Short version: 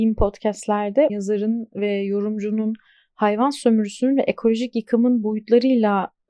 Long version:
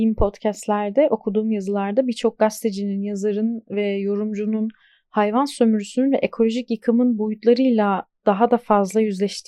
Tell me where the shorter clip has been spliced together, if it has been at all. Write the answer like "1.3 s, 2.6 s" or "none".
1.1 s